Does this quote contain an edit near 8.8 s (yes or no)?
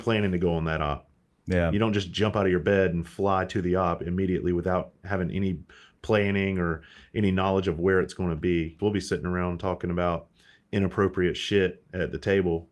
yes